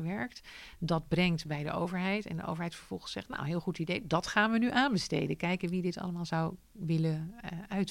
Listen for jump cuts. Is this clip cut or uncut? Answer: uncut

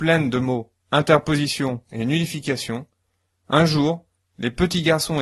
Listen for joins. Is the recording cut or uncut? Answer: cut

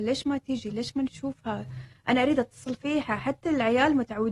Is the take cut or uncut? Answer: uncut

